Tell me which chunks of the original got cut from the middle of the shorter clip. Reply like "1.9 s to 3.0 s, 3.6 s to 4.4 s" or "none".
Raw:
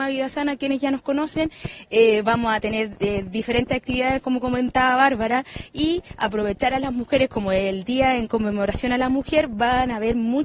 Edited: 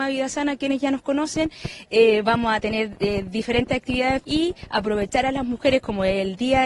4.2 s to 5.7 s